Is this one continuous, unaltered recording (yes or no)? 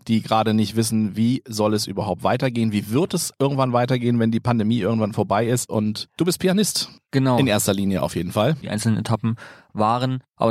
no